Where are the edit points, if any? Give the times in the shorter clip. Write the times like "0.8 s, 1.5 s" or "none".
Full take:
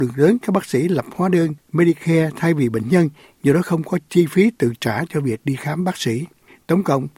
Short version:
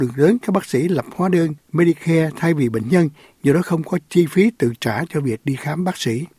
none

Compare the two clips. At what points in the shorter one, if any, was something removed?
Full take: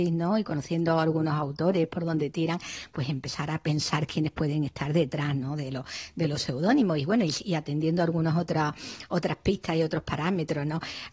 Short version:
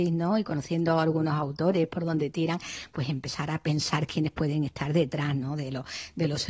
none

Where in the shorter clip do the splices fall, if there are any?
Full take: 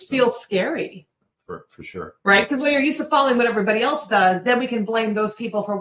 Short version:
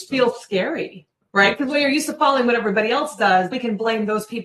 1.3 s, 3.5 s

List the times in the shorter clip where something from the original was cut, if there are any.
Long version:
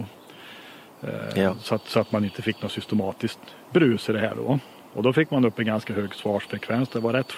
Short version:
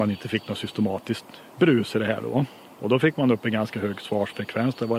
none

